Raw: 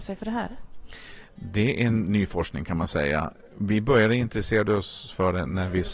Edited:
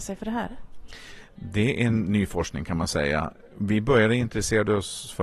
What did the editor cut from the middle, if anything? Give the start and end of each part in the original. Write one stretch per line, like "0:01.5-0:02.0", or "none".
none